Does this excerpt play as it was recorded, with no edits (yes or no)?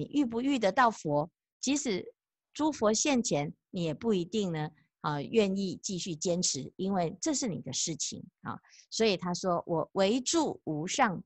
yes